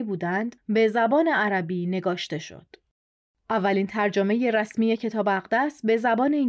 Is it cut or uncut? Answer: uncut